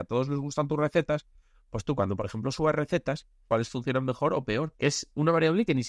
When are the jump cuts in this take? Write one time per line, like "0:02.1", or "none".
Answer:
0:03.5
0:04.7